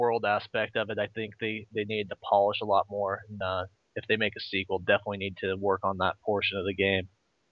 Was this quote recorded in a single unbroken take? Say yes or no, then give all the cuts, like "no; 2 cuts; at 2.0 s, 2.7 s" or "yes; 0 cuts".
yes; 0 cuts